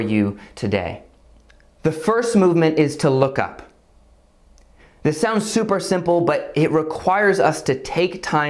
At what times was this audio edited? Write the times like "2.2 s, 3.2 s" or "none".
none